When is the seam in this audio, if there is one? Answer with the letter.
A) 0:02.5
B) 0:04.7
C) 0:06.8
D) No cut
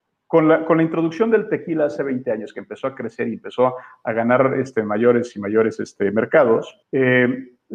C